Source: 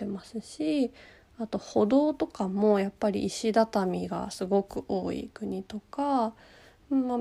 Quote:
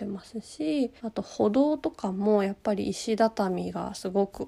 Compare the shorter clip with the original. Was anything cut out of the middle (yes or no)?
yes